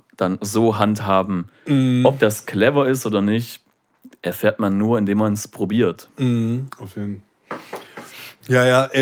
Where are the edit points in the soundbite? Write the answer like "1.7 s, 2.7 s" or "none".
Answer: none